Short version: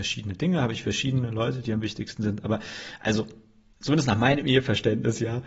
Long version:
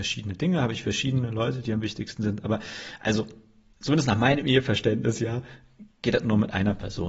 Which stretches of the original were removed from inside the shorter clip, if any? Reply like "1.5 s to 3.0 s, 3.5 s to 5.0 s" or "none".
none